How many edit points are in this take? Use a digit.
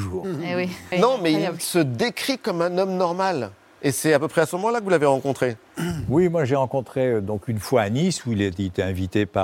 1